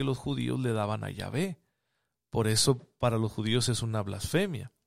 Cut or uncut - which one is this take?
uncut